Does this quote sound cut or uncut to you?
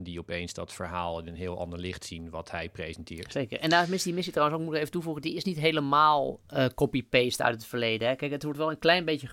uncut